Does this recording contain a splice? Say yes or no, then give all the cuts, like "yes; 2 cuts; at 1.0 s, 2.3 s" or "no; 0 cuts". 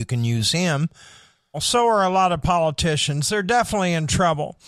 yes; 1 cut; at 1.5 s